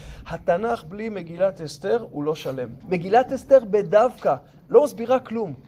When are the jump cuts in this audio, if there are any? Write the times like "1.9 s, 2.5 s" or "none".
2.8 s